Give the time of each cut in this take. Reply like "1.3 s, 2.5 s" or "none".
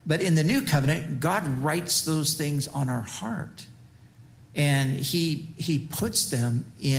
none